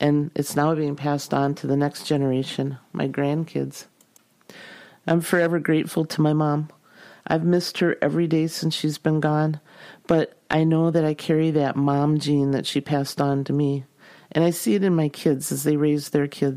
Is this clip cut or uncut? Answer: uncut